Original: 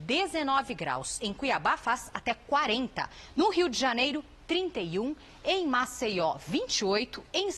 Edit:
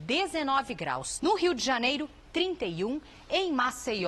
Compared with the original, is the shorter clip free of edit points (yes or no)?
no